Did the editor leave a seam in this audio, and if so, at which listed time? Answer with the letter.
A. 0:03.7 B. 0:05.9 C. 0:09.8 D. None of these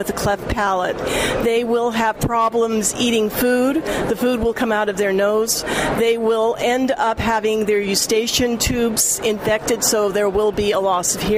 D